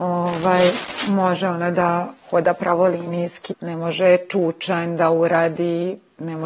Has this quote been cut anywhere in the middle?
yes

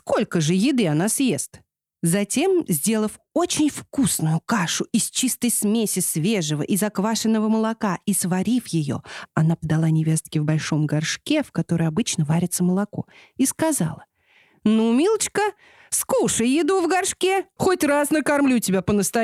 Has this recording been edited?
yes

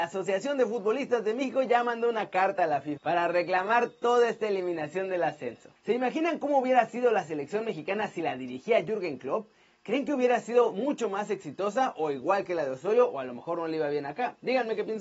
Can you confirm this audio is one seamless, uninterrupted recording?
no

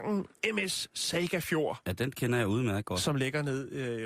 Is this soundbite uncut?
yes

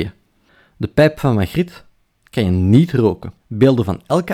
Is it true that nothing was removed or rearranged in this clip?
no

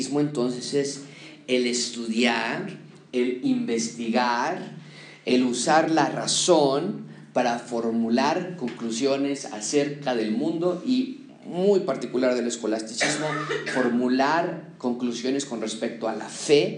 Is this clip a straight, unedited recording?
yes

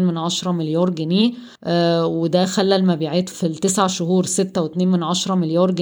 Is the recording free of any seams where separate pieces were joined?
no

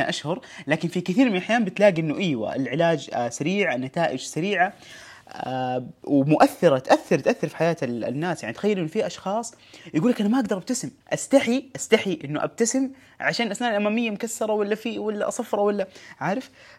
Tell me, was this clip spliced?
yes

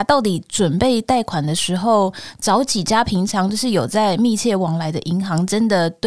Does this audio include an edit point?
no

